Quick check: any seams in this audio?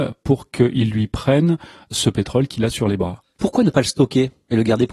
no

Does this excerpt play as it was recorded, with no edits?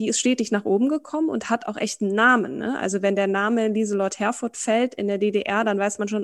yes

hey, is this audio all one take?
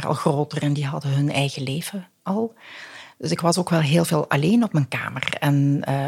yes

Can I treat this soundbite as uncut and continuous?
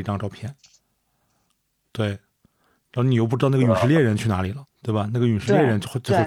no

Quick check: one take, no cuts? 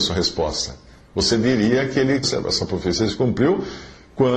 no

